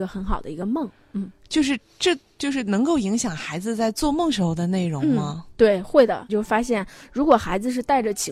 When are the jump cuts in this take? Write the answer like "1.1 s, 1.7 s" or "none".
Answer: 6.3 s